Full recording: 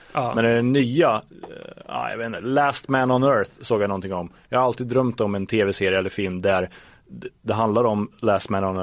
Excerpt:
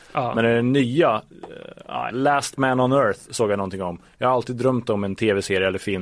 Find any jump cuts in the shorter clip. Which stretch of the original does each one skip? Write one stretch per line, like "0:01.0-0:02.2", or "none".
0:02.1-0:02.4